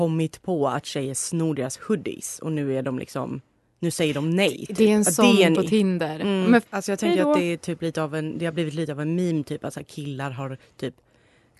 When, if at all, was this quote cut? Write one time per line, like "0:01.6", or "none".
0:05.6
0:06.7